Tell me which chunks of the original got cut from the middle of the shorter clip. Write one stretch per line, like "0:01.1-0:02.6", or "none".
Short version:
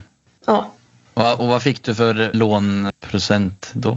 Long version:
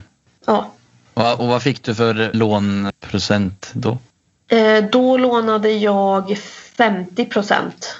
none